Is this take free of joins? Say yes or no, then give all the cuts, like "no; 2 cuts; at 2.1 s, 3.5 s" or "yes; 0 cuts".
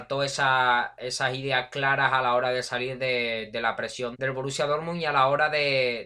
no; 1 cut; at 4.1 s